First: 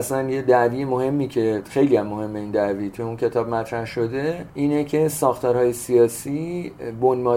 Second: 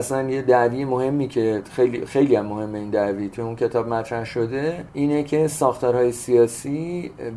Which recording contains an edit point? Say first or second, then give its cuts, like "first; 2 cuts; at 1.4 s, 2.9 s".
first; 1 cut; at 1.7 s